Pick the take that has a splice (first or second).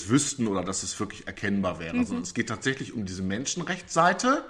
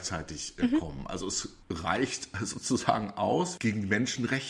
second